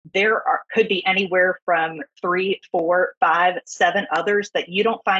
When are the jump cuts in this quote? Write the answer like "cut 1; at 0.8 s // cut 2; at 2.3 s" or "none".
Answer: none